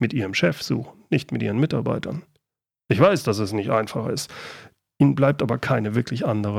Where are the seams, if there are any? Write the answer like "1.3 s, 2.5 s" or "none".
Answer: none